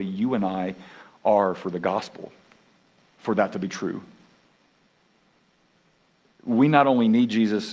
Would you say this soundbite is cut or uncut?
cut